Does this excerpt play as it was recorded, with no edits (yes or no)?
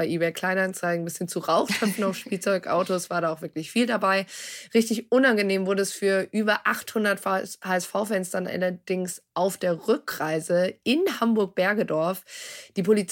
yes